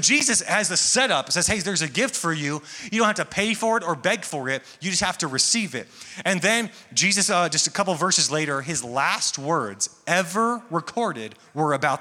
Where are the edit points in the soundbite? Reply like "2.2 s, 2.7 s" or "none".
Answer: none